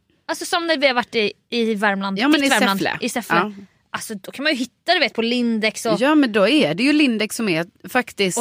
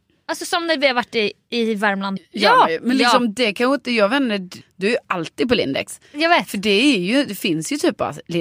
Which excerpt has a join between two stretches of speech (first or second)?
second